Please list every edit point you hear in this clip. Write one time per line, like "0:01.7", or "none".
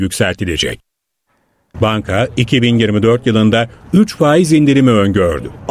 0:01.7